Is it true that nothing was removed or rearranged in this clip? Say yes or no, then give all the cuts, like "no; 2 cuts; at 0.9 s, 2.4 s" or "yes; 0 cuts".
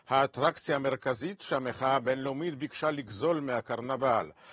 yes; 0 cuts